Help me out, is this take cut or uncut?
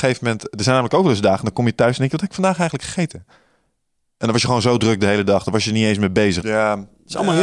cut